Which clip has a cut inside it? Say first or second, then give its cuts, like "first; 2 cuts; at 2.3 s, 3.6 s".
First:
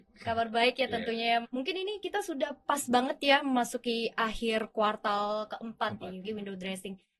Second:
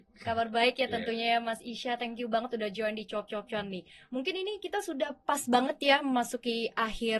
first; 2 cuts; at 1.4 s, 6.2 s